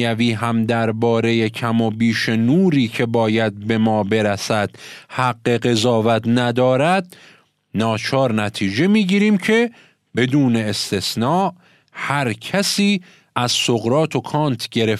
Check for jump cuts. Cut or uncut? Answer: uncut